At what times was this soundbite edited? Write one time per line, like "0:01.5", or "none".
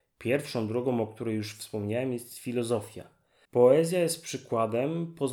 0:03.4